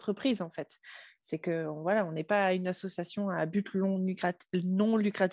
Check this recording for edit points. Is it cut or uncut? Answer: uncut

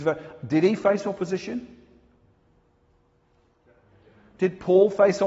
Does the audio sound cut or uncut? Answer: uncut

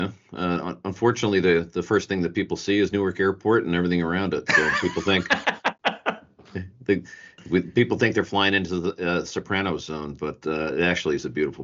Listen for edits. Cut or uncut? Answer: uncut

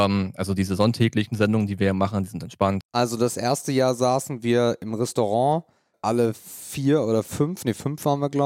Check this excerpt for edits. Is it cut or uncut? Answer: cut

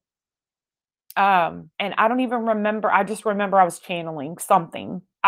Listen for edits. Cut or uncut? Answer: cut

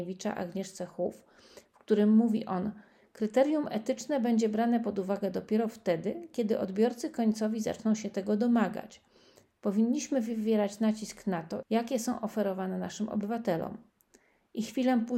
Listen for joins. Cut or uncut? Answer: cut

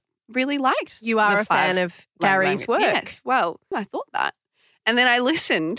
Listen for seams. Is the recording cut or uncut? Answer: cut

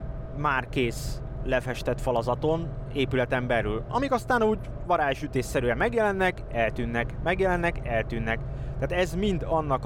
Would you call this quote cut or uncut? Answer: uncut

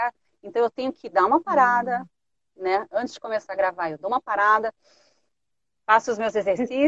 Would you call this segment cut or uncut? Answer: uncut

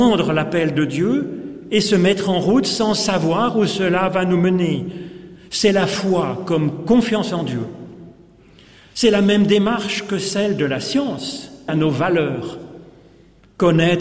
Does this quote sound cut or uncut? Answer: cut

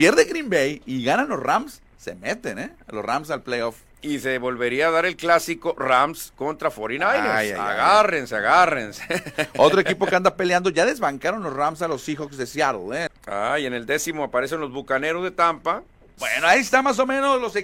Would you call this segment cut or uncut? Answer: cut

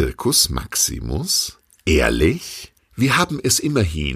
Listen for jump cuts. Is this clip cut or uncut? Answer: uncut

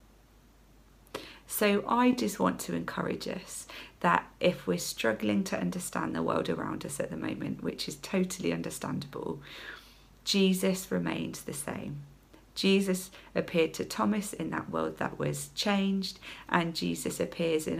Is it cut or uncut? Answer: uncut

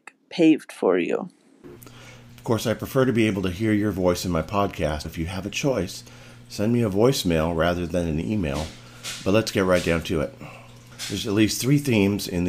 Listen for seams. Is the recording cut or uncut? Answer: cut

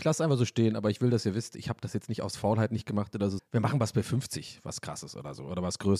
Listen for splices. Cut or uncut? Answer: cut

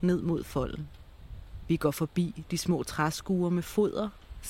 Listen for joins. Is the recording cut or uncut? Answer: uncut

